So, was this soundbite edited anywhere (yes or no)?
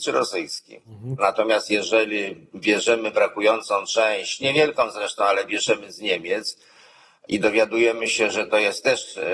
yes